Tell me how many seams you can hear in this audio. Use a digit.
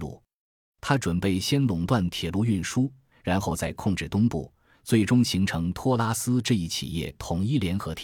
2